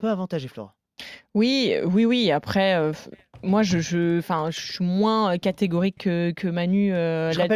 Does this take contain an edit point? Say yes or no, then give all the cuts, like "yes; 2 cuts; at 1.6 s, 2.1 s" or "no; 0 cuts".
no; 0 cuts